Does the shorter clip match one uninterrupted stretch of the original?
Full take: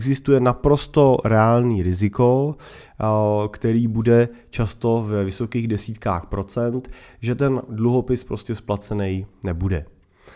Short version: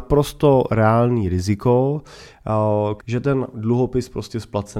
no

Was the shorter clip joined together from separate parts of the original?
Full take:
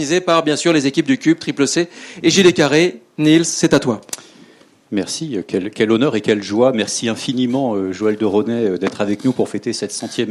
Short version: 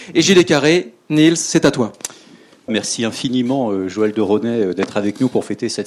yes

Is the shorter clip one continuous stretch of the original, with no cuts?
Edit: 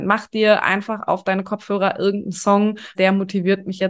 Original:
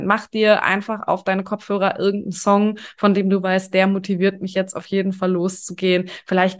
no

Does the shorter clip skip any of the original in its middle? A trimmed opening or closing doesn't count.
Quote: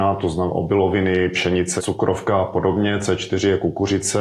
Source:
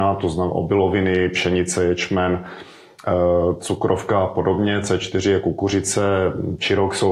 yes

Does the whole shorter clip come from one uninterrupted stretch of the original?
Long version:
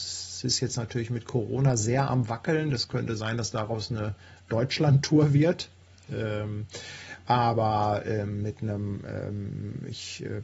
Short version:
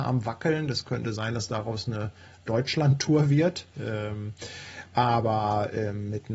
no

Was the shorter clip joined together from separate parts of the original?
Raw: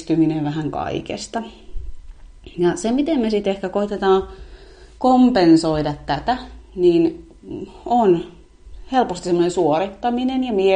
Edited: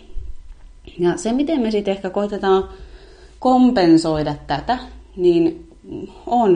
no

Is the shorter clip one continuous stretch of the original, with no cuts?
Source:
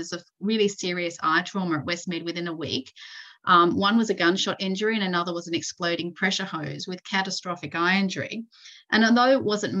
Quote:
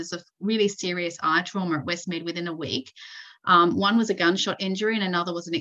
yes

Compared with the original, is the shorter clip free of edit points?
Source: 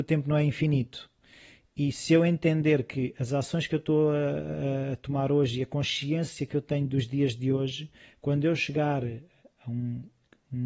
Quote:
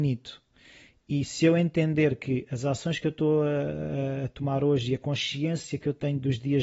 yes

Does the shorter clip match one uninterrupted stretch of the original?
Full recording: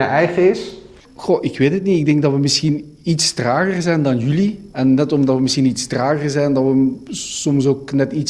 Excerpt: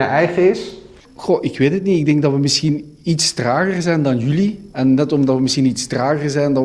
yes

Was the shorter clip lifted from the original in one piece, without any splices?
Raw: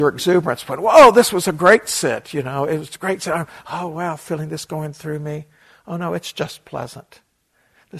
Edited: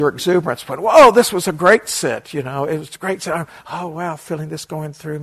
yes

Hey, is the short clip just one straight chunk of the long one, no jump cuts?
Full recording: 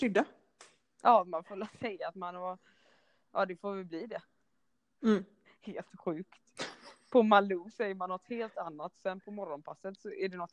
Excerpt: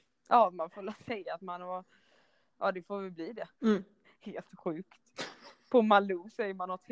no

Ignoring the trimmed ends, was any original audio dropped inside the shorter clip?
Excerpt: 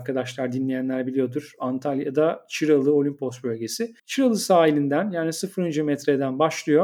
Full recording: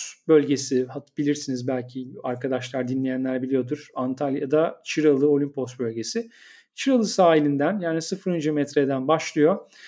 yes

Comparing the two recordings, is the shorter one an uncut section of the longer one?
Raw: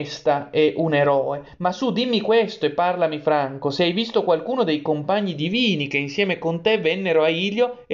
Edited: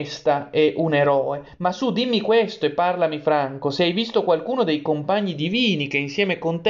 yes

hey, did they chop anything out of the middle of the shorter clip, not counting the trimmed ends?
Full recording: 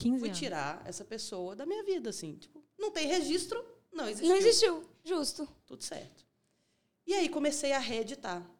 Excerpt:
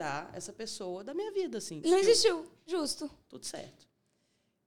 yes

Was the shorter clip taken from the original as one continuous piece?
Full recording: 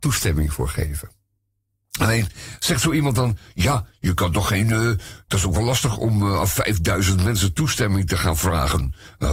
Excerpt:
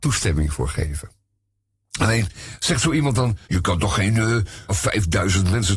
no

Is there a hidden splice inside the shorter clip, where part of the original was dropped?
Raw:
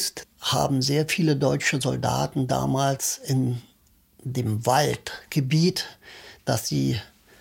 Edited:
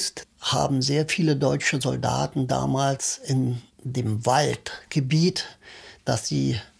yes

